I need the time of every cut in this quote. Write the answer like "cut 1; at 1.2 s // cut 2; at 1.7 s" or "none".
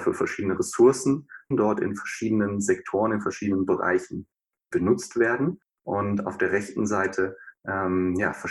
cut 1; at 1.5 s